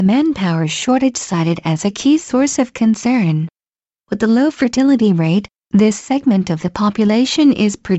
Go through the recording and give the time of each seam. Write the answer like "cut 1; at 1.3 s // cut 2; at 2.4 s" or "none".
cut 1; at 3.9 s